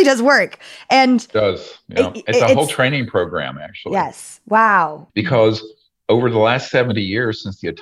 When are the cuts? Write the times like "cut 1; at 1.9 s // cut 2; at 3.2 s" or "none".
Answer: cut 1; at 5.1 s